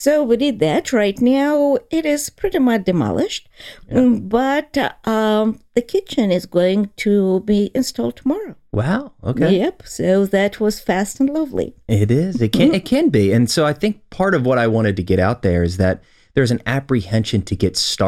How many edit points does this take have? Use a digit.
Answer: 0